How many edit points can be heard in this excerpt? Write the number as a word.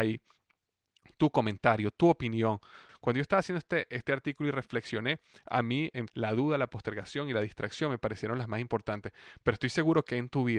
two